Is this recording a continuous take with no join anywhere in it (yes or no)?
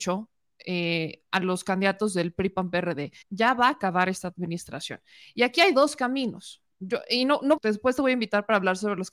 no